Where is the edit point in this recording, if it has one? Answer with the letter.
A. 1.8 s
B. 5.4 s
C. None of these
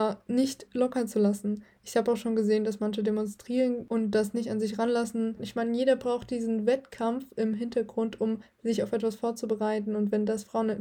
B